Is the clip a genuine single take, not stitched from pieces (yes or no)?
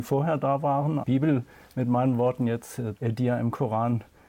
no